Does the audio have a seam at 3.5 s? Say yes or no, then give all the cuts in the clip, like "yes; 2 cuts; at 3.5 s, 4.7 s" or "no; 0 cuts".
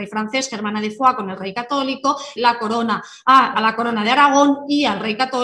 yes; 2 cuts; at 2.4 s, 3.5 s